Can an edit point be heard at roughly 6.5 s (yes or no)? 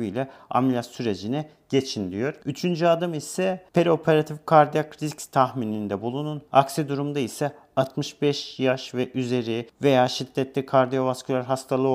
yes